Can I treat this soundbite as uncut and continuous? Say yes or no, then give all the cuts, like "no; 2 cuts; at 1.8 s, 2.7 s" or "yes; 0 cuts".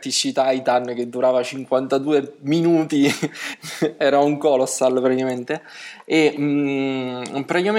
yes; 0 cuts